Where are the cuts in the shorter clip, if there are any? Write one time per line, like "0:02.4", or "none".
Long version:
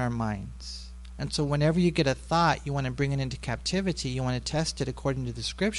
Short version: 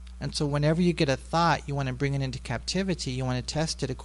none